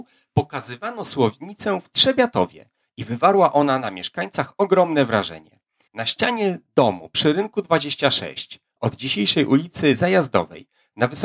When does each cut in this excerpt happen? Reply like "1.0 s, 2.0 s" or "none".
5.9 s